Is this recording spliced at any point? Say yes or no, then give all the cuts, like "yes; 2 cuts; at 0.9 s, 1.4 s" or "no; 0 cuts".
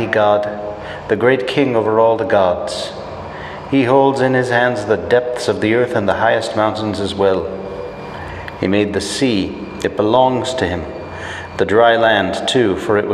no; 0 cuts